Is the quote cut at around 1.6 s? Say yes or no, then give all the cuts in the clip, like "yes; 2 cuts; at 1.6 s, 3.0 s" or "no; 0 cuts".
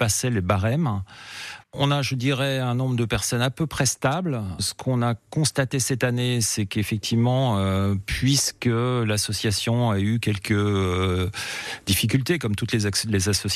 yes; 1 cut; at 1.6 s